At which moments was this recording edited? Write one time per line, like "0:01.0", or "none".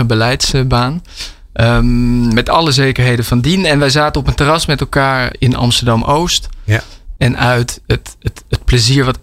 0:05.3
0:07.2